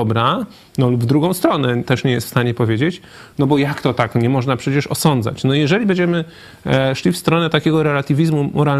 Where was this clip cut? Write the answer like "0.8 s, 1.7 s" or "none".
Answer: none